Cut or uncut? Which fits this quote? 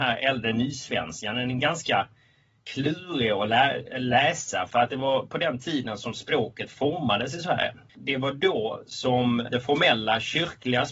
uncut